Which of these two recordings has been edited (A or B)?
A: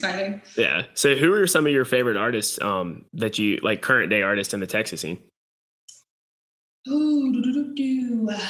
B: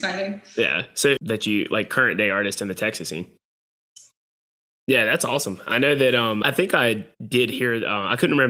B